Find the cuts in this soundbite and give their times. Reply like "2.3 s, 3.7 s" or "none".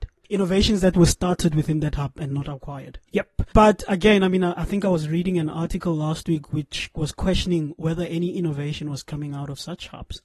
3.1 s